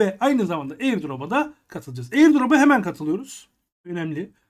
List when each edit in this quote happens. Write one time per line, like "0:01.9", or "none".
none